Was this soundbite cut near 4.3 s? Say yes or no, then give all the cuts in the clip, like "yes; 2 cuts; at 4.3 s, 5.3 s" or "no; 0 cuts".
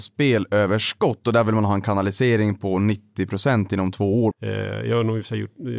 yes; 1 cut; at 4.3 s